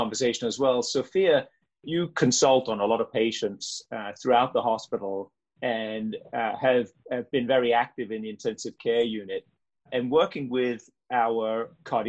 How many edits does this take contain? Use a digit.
0